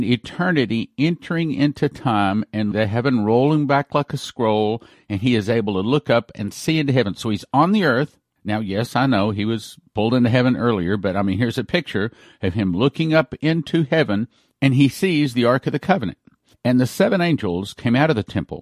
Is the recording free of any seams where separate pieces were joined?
no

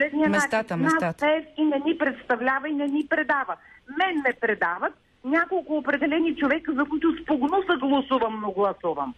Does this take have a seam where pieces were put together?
no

